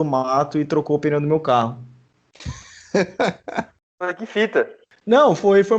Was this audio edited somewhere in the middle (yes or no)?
no